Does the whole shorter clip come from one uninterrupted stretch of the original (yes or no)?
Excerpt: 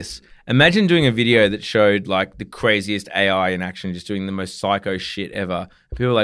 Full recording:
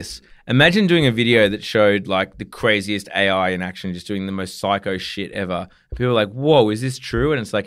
yes